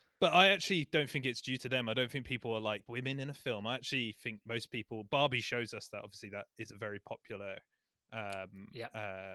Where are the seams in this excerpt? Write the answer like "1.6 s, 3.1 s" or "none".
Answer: 2.9 s